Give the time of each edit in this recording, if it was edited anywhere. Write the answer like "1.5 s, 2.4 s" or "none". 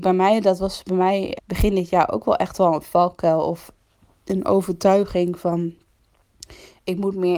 1.4 s

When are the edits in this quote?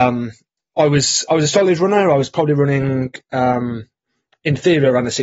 none

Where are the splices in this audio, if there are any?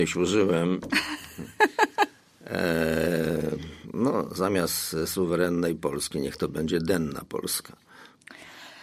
none

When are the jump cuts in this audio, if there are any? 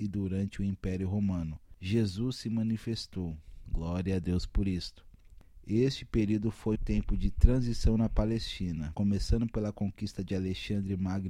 6.7 s, 8.9 s

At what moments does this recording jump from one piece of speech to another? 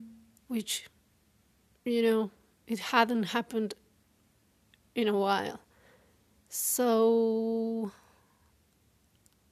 none

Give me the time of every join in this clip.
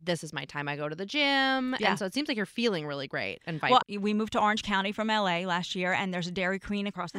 3.8 s

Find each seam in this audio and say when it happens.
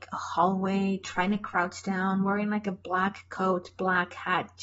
none

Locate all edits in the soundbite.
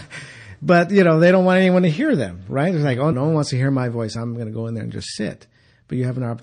3.1 s

